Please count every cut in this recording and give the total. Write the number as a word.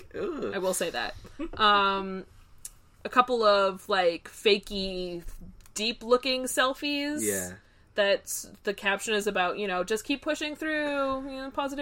zero